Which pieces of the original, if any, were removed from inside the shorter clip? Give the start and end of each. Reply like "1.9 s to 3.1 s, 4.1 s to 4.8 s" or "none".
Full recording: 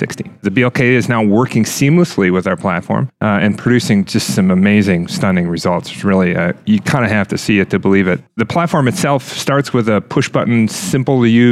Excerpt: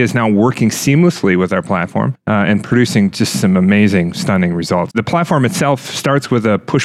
5.8 s to 8.3 s